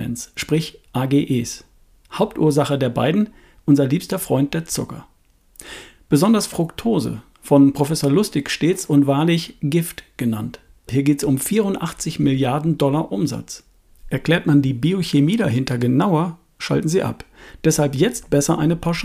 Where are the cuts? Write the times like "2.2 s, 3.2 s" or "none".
10.9 s, 13.9 s